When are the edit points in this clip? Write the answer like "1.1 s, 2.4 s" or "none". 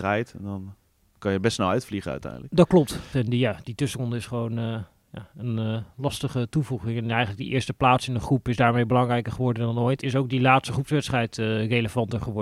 3.1 s, 10.0 s